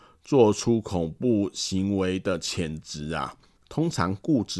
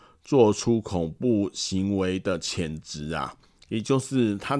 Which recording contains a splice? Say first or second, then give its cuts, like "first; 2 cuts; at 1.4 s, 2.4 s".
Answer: first; 1 cut; at 3.6 s